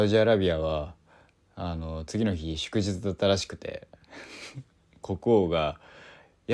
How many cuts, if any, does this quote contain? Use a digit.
0